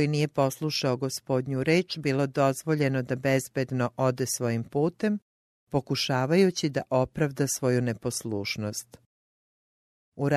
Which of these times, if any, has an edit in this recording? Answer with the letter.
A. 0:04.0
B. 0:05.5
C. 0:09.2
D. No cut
B